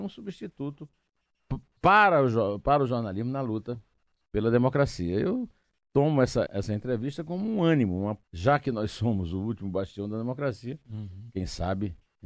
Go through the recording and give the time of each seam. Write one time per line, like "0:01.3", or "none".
0:06.5
0:08.2